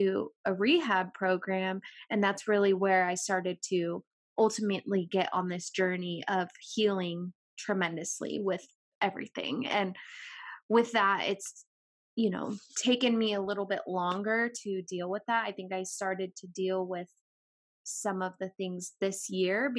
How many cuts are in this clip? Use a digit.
0